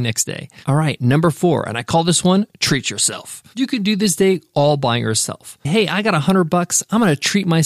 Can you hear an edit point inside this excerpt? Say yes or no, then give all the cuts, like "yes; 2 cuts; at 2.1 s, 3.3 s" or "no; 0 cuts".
yes; 1 cut; at 5.6 s